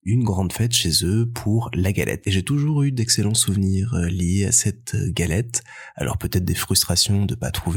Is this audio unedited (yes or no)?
no